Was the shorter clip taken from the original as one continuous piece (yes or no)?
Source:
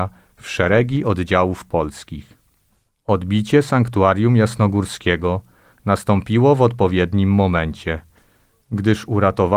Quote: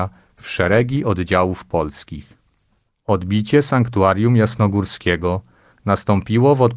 yes